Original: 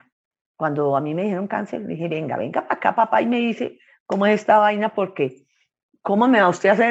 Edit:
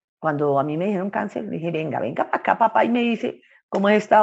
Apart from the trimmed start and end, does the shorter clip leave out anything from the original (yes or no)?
no